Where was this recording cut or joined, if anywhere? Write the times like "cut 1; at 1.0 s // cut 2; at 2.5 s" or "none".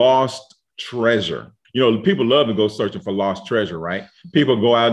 cut 1; at 1.6 s

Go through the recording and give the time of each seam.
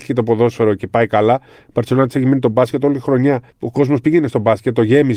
cut 1; at 3.5 s

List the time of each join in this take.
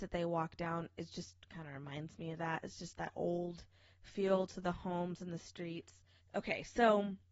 cut 1; at 6.2 s

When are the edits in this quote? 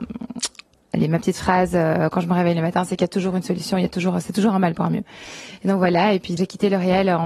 cut 1; at 6.4 s

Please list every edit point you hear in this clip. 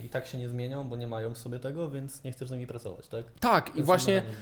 none

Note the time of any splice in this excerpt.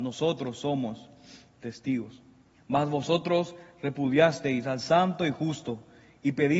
cut 1; at 2.5 s

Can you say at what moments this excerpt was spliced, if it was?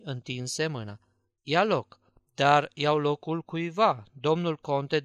cut 1; at 1.4 s

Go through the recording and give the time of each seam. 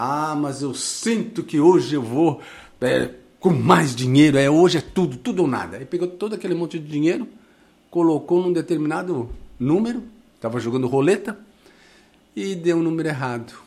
none

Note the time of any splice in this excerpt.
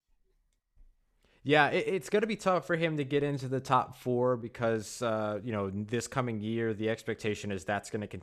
none

